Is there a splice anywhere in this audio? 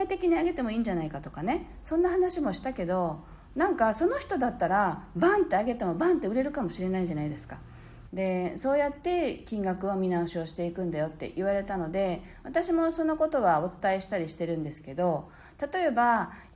yes; 1 cut; at 8.1 s

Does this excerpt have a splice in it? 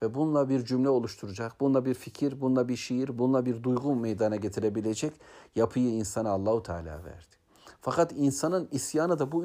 no; 0 cuts

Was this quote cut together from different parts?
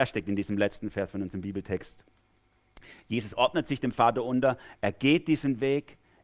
no; 0 cuts

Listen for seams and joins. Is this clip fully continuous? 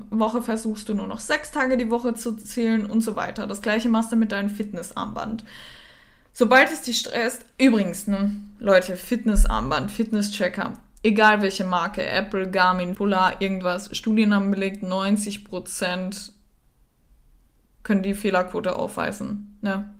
no; 1 cut; at 12.9 s

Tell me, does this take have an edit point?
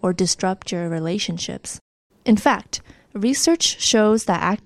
yes; 1 cut; at 2.1 s

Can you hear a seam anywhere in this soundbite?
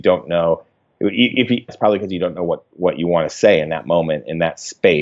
yes; 1 cut; at 1.7 s

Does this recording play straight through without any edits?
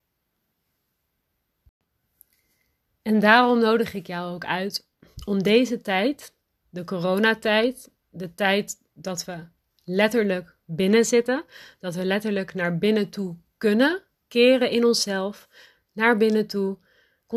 yes; 0 cuts

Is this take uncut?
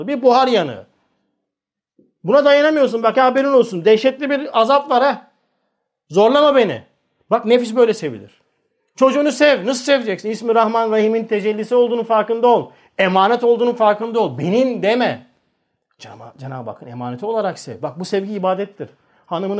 yes; 0 cuts

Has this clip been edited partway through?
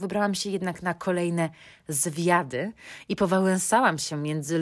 no; 0 cuts

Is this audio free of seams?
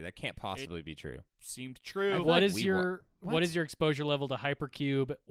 no; 1 cut; at 1.3 s

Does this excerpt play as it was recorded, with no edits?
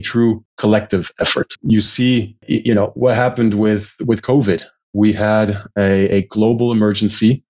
yes; 0 cuts

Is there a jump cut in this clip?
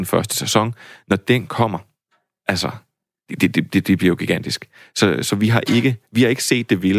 no; 0 cuts

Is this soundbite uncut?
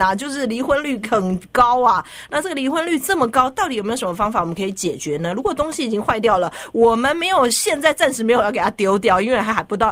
yes; 0 cuts

